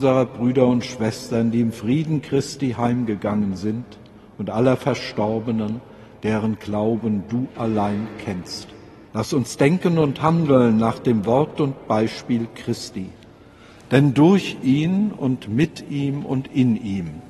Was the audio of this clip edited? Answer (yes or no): yes